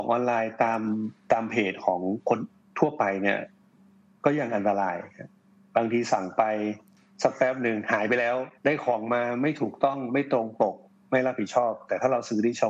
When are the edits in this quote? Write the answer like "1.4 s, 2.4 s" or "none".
8.6 s